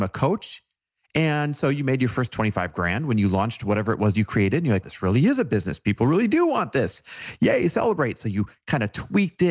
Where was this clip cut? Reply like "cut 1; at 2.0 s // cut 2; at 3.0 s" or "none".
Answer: cut 1; at 4.8 s